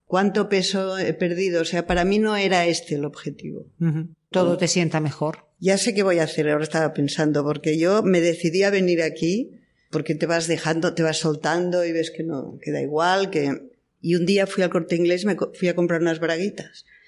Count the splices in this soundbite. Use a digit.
1